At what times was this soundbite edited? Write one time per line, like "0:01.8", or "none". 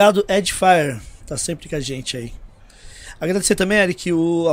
none